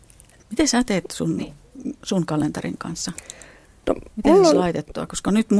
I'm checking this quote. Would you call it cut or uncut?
uncut